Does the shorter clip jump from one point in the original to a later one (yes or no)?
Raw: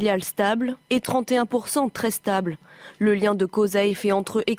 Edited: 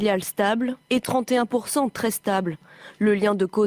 no